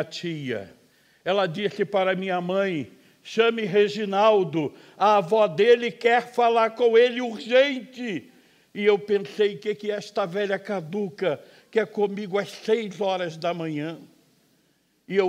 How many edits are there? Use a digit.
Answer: 0